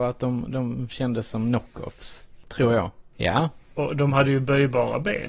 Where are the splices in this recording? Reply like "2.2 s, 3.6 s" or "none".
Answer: 3.1 s